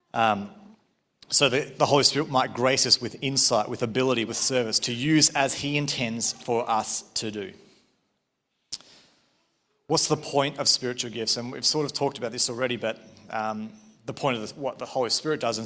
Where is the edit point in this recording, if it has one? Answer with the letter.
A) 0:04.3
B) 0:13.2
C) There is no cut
A